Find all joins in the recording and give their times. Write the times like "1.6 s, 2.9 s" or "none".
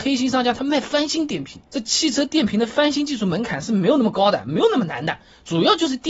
none